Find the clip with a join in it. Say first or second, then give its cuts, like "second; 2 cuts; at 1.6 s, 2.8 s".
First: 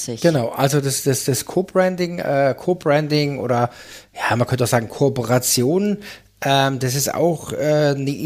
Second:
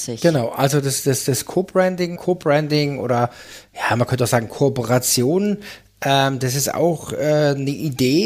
second; 1 cut; at 2.2 s